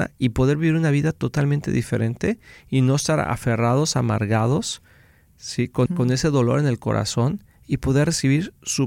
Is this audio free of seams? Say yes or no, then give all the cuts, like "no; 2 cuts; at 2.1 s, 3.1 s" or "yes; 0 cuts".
no; 1 cut; at 5.9 s